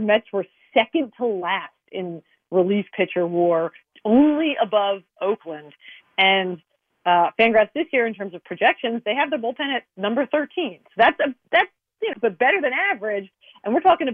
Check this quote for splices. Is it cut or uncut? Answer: cut